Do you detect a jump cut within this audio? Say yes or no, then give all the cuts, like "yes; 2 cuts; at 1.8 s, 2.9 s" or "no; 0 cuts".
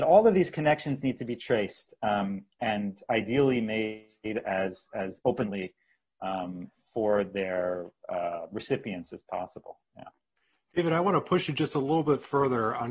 no; 0 cuts